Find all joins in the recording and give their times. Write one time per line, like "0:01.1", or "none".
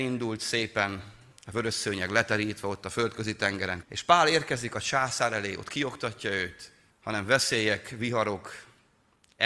0:03.8
0:06.9